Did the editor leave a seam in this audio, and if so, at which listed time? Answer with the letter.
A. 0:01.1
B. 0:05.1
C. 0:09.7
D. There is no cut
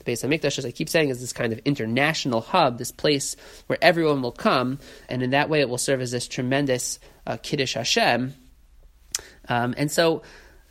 B